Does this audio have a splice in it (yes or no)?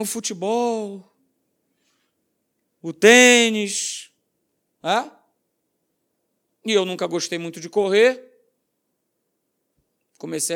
no